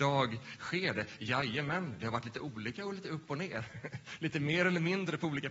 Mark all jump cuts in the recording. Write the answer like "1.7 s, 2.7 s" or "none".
none